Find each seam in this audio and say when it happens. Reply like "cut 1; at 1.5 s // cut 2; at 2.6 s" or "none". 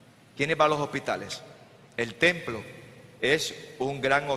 cut 1; at 1.9 s